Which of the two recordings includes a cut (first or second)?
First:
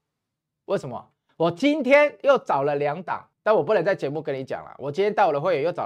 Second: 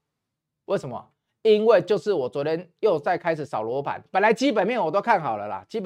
first